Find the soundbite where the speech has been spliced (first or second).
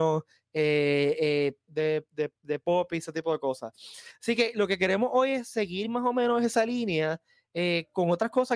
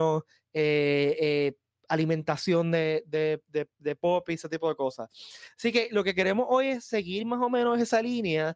first